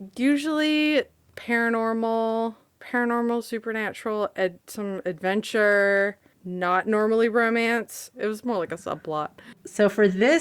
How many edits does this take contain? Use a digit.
1